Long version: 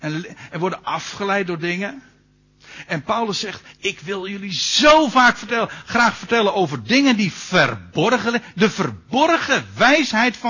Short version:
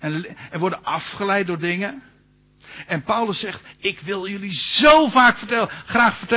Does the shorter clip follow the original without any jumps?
yes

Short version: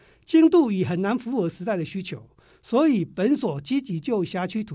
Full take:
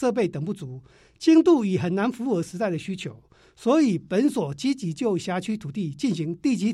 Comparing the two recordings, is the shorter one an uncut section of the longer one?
yes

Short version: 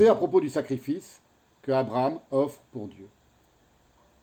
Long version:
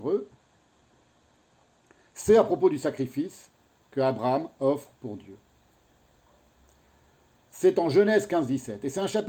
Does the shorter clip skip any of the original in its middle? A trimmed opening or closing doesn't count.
no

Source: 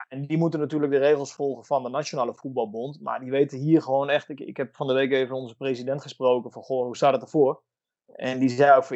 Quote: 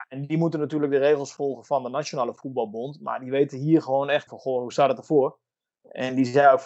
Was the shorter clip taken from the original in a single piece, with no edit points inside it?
no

